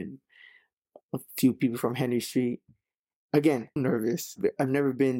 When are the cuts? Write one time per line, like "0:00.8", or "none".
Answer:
0:03.8